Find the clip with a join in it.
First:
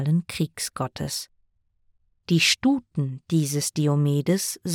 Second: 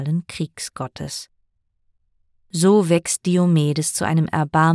first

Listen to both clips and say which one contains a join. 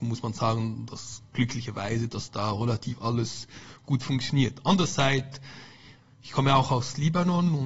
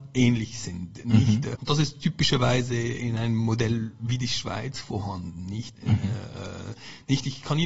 second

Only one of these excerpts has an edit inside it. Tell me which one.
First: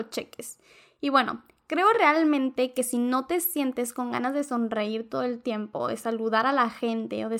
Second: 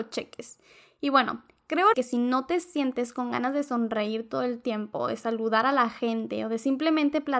second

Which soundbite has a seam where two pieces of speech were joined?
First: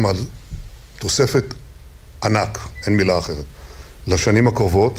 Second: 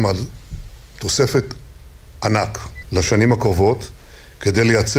second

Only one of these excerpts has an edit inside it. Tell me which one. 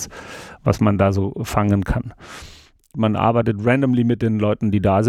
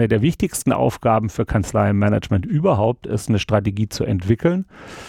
first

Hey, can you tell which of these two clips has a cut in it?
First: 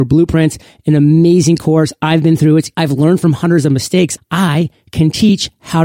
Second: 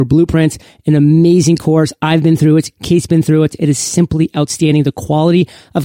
first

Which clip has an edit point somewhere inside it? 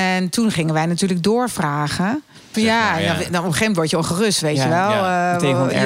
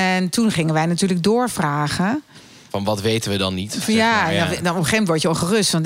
first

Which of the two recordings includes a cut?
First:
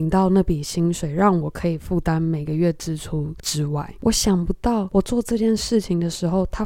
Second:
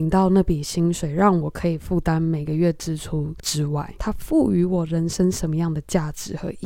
second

